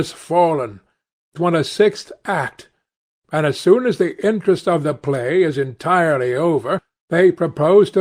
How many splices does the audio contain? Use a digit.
1